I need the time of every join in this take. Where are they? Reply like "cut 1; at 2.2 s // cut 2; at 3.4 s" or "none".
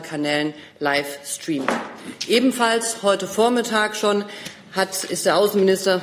none